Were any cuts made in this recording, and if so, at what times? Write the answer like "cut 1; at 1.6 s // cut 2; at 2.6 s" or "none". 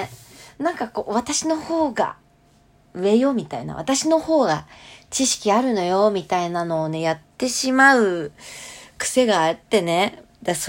none